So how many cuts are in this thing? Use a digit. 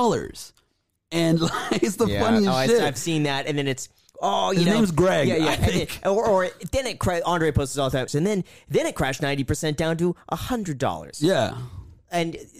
1